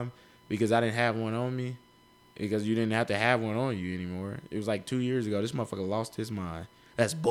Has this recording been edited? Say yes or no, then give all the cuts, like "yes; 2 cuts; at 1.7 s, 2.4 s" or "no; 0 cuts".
no; 0 cuts